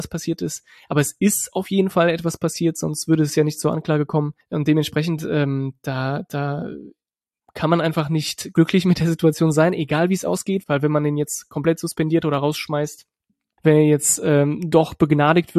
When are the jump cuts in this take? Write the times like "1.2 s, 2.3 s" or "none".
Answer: 10.6 s, 13.6 s